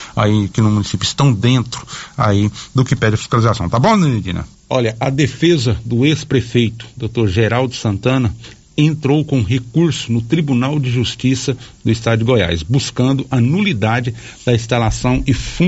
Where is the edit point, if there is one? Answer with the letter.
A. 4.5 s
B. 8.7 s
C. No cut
A